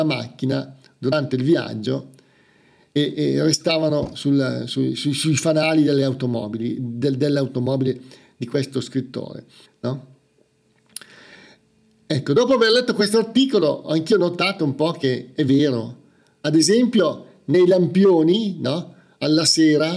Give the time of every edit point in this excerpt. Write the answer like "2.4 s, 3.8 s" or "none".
9.6 s